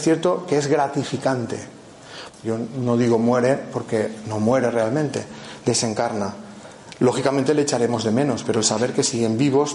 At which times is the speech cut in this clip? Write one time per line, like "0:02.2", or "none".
0:02.3